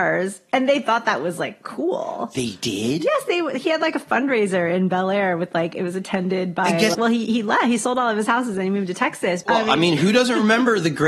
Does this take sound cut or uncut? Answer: cut